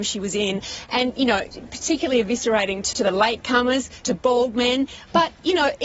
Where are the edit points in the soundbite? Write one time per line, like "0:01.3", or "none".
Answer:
0:02.9
0:04.0